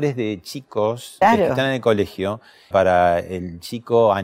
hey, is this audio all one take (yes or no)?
no